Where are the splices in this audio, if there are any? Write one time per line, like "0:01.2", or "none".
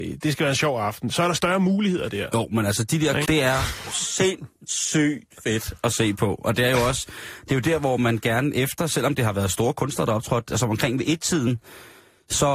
0:03.2

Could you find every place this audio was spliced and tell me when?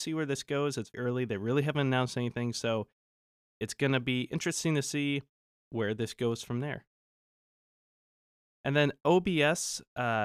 0:00.9

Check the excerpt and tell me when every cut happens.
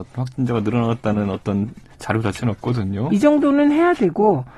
0:03.1

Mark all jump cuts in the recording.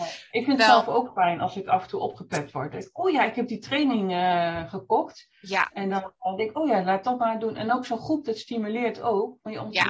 none

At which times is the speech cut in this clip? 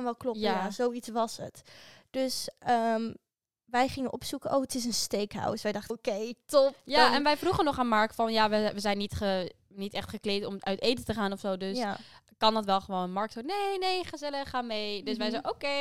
0:05.9

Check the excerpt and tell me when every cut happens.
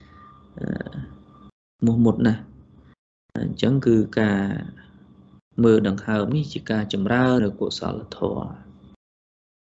0:07.4

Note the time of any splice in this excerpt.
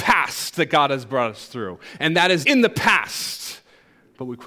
0:02.4

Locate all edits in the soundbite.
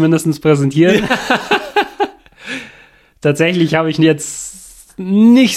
none

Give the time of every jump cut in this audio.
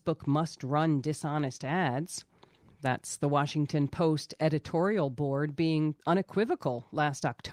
0:02.6
0:06.0

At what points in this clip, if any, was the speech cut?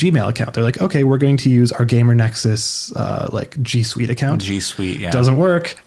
none

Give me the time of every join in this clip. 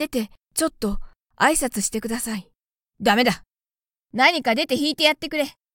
0:04.0

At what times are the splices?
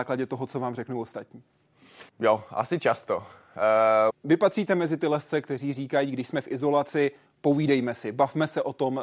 0:02.1
0:04.1

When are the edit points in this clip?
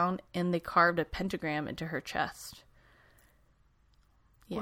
none

